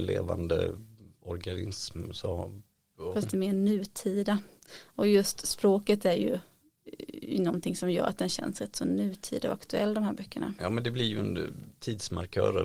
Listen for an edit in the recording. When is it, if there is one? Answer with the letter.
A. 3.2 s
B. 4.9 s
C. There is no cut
A